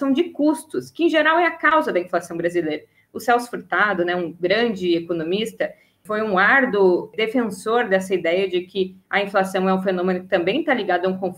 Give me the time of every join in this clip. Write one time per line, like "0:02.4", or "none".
none